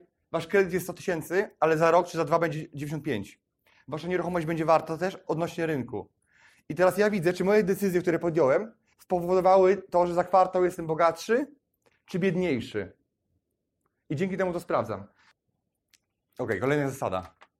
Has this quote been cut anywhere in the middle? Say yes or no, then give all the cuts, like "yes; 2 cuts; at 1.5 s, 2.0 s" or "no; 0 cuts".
no; 0 cuts